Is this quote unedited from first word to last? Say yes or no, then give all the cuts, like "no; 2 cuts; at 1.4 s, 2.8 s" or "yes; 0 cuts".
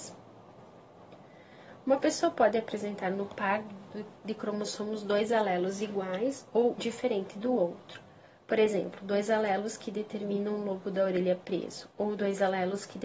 no; 1 cut; at 6.8 s